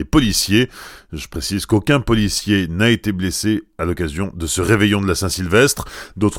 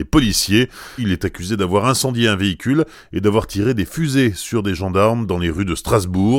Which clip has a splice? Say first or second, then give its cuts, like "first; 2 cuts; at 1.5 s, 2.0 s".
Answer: second; 1 cut; at 1.0 s